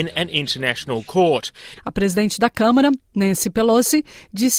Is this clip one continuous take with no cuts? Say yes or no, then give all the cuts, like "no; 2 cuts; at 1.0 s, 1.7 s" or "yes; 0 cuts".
no; 1 cut; at 1.8 s